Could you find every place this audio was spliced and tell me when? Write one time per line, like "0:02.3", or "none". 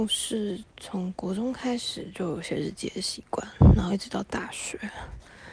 none